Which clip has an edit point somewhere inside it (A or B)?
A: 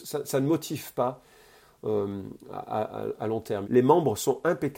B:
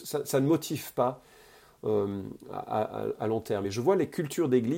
A